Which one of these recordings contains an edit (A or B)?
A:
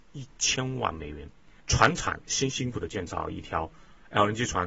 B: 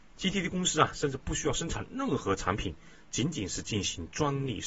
A